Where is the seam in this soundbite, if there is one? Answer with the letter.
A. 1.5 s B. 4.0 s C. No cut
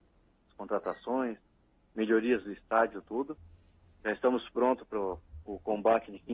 B